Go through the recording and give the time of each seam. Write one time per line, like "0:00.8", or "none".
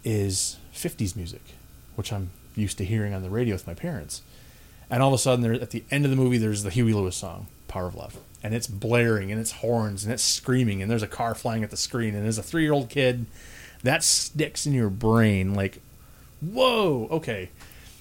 none